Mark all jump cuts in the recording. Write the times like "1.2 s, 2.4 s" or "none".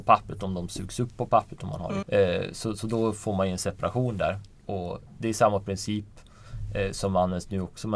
2.0 s